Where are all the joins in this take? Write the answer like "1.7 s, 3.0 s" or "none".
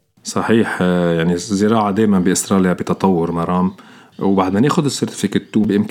none